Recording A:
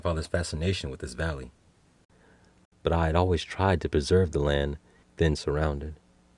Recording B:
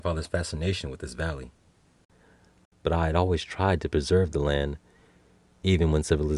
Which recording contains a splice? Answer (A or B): A